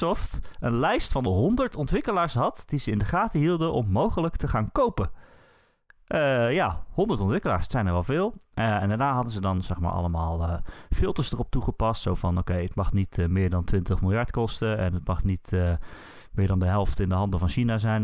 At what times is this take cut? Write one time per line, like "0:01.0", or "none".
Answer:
none